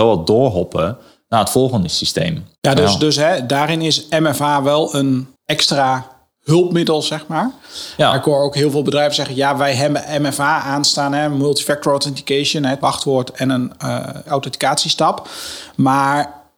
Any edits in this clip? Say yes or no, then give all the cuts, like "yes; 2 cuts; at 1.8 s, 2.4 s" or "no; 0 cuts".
yes; 1 cut; at 5.4 s